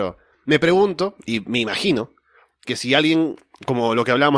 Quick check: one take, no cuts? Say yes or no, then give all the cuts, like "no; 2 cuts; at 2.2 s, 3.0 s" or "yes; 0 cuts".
yes; 0 cuts